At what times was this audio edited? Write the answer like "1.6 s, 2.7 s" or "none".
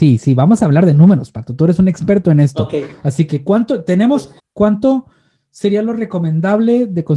4.4 s